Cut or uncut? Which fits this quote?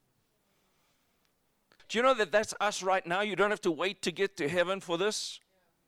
cut